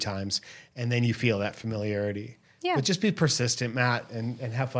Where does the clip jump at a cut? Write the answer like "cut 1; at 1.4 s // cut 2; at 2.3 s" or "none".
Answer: none